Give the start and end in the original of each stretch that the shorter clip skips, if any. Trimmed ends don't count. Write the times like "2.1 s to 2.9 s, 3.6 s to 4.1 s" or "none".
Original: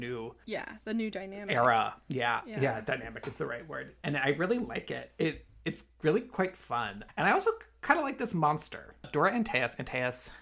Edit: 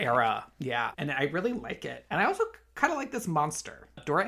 2.4 s to 4.0 s, 5.1 s to 7.1 s